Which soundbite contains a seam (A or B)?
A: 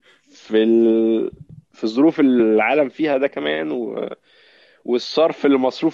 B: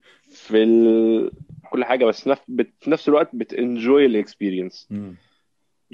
B